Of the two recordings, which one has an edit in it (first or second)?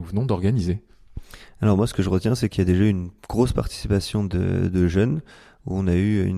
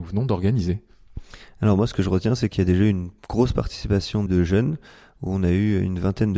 second